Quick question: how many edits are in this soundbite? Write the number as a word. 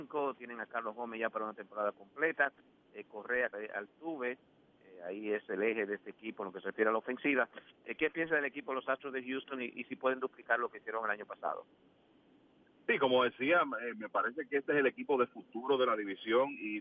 one